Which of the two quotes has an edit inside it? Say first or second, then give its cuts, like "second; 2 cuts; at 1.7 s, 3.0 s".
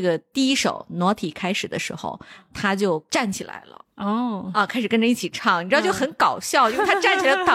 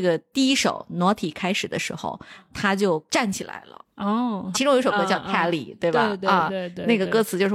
second; 1 cut; at 4.5 s